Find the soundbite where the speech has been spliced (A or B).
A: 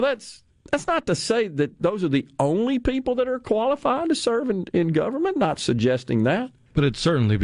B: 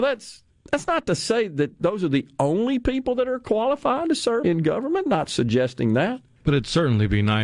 B